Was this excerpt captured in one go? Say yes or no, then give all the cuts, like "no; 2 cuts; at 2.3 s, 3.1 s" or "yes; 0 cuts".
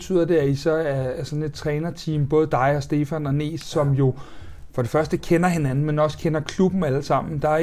yes; 0 cuts